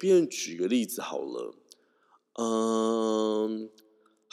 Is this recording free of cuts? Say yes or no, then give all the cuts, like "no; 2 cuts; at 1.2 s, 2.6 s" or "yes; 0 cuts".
yes; 0 cuts